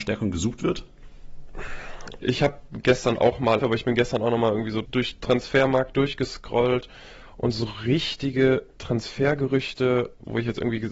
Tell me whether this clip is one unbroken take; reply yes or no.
no